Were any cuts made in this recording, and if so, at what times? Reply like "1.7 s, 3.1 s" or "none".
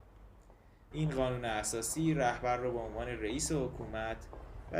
0.9 s